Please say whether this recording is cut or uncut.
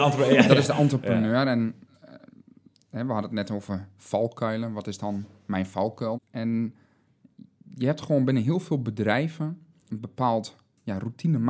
cut